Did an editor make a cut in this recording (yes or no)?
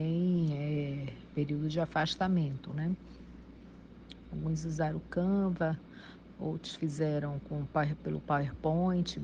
yes